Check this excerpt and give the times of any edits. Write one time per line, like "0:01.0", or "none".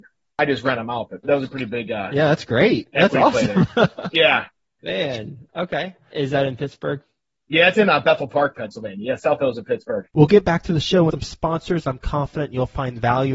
0:11.1